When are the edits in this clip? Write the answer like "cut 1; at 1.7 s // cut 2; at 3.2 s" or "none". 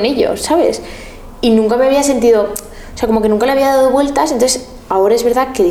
none